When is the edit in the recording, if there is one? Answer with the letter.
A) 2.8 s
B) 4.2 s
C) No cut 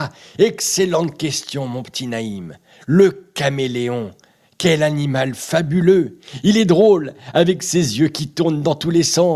C